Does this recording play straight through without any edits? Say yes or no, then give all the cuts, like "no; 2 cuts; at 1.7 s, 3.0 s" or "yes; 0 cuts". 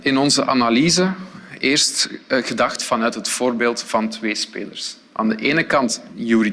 yes; 0 cuts